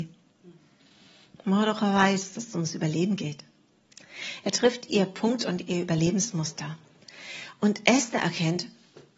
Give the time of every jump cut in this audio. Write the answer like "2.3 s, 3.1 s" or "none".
none